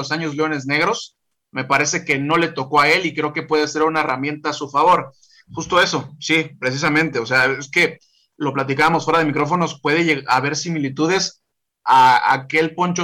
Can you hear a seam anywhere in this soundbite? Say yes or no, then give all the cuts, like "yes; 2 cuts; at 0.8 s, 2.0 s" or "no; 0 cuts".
yes; 1 cut; at 5.5 s